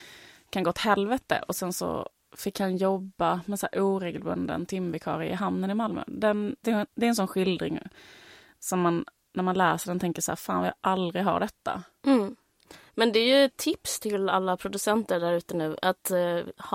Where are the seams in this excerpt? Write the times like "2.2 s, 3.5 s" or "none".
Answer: 6.6 s

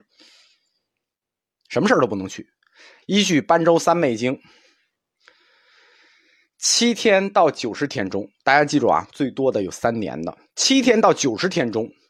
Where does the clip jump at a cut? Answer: 3.0 s

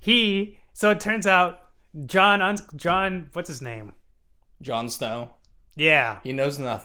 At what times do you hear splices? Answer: none

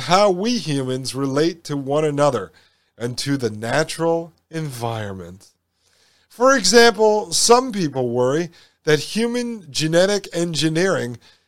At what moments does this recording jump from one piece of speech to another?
none

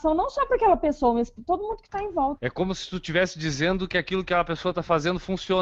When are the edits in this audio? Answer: 2.4 s

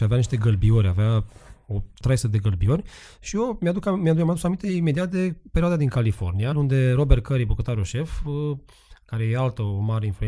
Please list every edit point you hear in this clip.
6.5 s

